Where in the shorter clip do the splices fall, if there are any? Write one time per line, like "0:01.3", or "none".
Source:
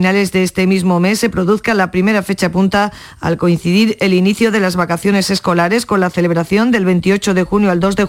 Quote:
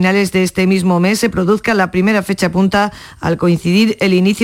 none